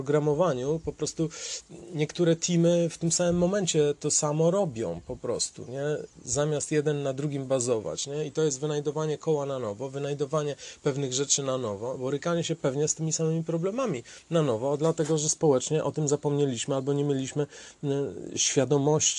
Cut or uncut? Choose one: uncut